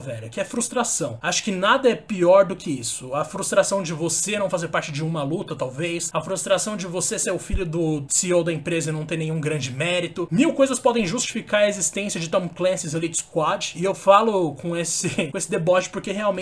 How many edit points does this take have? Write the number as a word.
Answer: zero